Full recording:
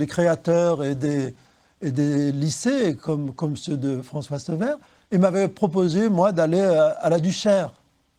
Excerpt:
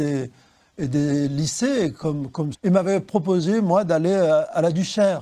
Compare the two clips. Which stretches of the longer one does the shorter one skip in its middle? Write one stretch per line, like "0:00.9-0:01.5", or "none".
0:03.6-0:05.0